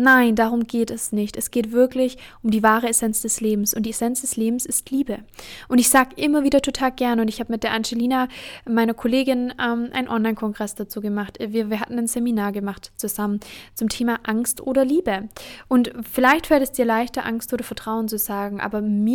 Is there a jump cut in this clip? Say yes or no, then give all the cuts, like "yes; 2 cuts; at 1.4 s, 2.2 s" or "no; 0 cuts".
no; 0 cuts